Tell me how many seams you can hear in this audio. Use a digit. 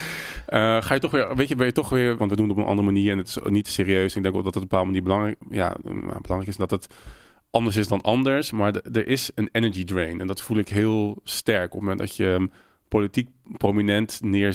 1